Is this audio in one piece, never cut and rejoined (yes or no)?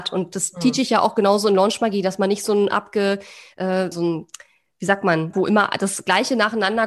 no